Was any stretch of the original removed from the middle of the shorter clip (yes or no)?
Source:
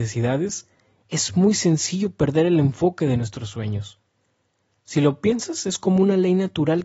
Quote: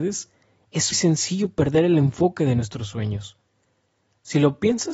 yes